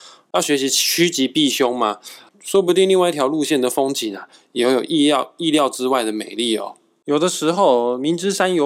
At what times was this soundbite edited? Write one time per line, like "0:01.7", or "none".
0:02.3